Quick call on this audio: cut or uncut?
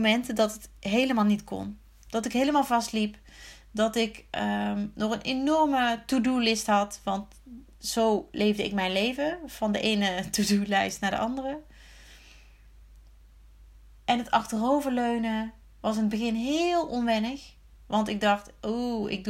uncut